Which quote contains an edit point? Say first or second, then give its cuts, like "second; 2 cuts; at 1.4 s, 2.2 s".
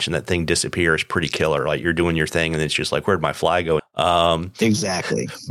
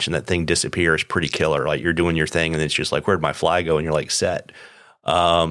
first; 1 cut; at 3.8 s